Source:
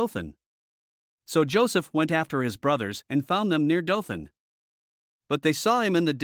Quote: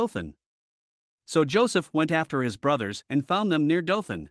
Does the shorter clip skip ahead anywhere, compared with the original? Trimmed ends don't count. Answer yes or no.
no